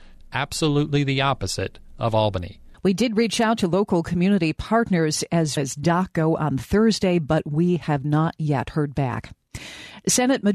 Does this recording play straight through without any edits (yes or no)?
no